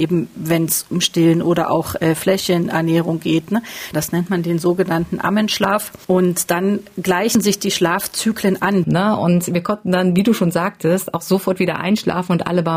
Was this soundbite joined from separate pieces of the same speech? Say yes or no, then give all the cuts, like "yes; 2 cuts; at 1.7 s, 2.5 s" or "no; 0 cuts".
yes; 2 cuts; at 3.9 s, 8.8 s